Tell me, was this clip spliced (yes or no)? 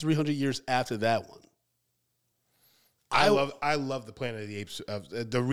yes